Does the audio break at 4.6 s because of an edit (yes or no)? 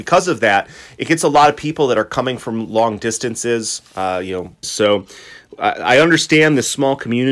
yes